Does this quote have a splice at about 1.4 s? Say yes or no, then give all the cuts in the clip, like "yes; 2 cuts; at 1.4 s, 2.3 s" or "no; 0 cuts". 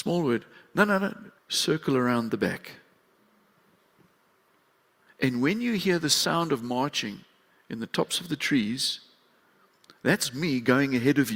yes; 1 cut; at 1.4 s